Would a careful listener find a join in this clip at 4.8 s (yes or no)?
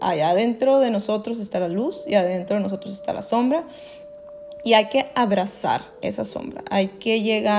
no